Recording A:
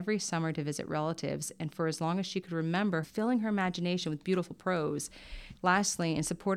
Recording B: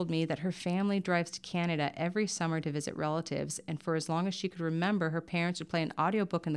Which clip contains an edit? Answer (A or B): A